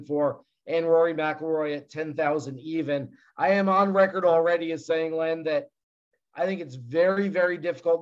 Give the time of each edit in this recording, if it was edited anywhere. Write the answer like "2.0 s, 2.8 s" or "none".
none